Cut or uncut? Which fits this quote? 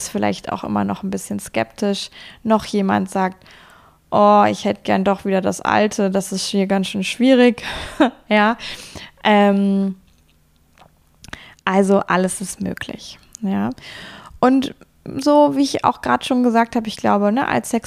uncut